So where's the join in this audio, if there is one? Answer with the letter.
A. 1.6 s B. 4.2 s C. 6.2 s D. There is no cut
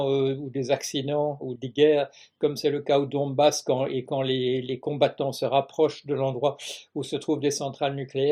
A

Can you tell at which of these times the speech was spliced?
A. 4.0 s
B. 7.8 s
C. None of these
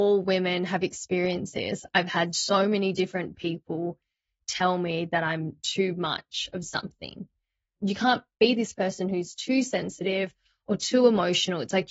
B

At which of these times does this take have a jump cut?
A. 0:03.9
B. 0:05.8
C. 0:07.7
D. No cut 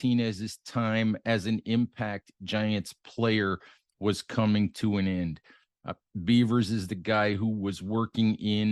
B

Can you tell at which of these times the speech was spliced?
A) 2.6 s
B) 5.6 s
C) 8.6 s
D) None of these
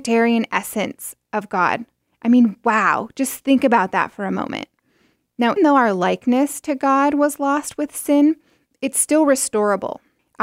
B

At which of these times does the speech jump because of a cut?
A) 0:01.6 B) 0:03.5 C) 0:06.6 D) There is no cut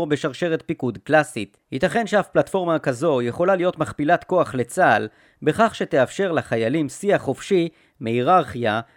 A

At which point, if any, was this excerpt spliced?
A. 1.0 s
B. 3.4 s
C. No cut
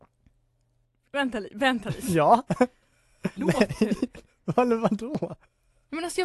B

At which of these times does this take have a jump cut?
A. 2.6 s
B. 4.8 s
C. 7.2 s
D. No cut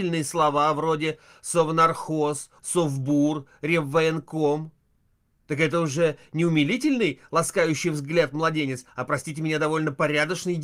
A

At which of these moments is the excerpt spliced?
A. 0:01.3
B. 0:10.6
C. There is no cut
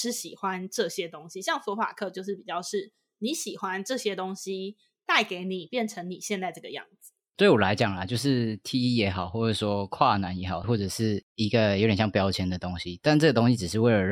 B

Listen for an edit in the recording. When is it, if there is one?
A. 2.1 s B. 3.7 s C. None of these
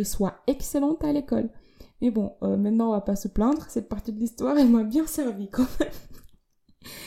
C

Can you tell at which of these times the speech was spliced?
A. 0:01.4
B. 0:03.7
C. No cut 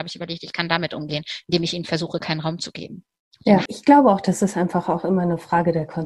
B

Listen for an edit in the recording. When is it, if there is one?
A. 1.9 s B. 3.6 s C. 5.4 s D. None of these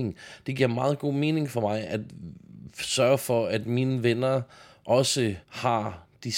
C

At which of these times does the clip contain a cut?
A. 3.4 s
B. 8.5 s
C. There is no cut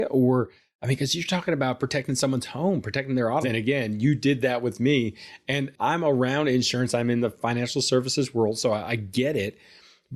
A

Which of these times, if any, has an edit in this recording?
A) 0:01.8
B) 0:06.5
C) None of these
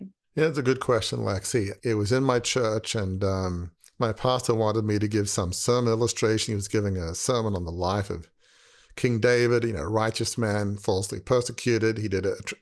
A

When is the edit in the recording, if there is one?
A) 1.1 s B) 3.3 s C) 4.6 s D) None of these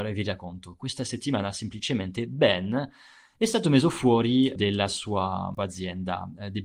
C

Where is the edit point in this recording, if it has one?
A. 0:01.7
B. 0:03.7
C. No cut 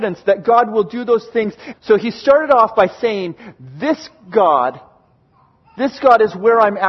A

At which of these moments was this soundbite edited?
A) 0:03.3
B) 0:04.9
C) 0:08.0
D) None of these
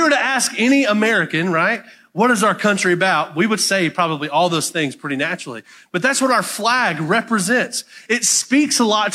D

